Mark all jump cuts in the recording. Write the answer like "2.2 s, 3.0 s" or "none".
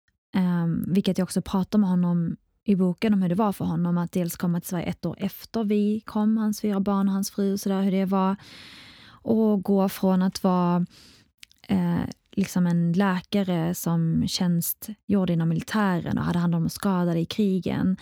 none